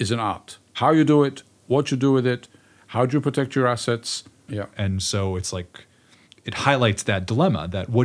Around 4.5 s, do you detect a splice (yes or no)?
yes